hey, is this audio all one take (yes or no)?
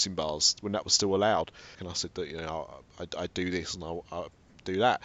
no